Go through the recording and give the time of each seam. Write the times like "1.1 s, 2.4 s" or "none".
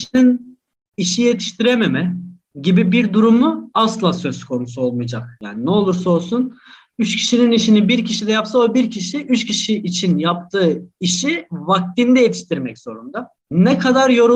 none